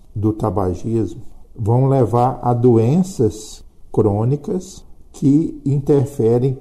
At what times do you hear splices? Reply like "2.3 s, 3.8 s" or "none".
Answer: 1.4 s